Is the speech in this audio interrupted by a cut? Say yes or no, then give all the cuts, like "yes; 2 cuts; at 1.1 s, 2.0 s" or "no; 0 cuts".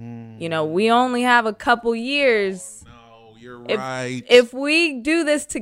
no; 0 cuts